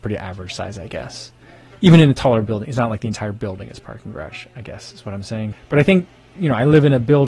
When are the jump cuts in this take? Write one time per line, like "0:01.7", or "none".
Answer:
0:05.5